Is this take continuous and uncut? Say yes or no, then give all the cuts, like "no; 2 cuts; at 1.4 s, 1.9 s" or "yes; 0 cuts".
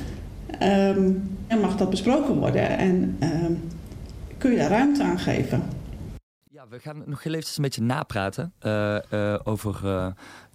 no; 2 cuts; at 1.5 s, 8.6 s